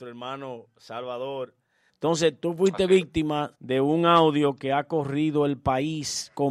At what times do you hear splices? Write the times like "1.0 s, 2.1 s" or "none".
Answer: 1.9 s, 3.6 s